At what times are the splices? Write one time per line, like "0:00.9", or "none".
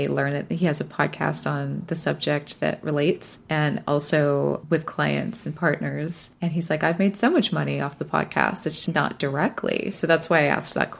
0:08.8
0:09.9